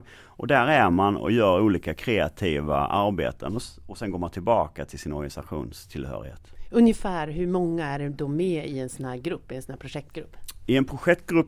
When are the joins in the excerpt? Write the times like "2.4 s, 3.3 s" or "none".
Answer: none